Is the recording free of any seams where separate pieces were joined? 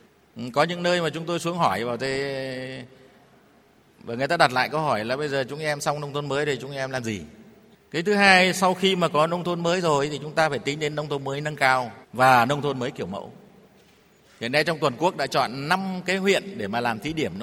no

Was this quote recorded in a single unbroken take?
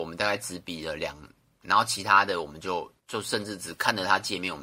no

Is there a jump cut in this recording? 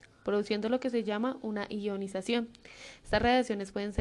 no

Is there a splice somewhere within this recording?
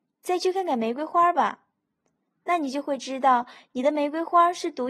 no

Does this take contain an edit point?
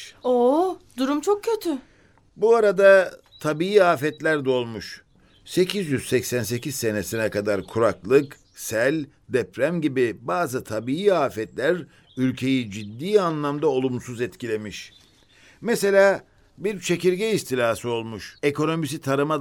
yes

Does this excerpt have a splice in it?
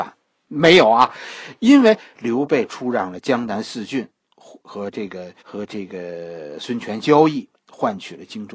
yes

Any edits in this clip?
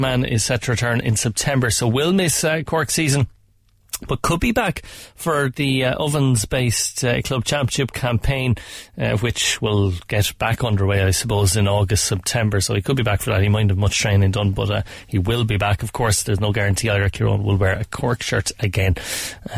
no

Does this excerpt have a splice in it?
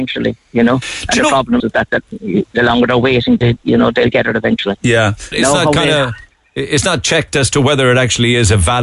yes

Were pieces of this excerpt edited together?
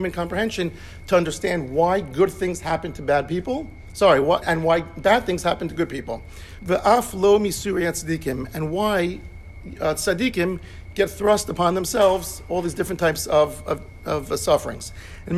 yes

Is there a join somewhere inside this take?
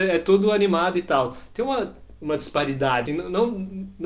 yes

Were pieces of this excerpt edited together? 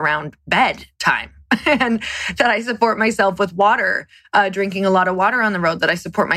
no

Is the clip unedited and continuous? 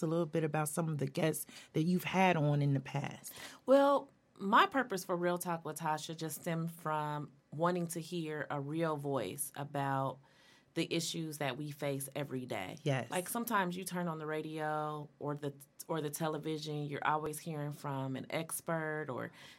yes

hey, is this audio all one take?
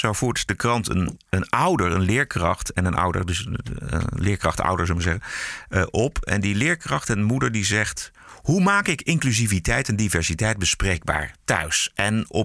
yes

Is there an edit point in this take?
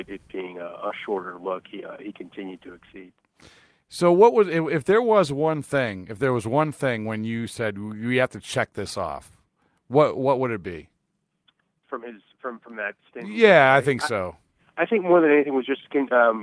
no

